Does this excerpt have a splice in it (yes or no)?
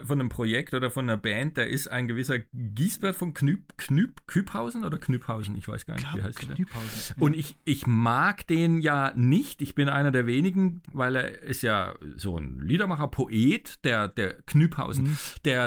yes